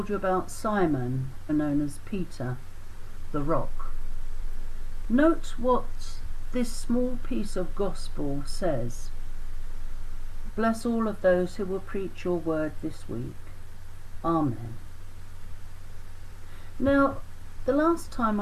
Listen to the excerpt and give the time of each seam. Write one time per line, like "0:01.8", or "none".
0:01.5
0:05.0
0:10.5